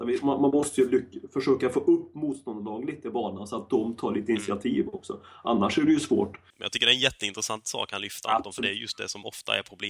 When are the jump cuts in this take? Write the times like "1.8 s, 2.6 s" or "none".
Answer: 6.5 s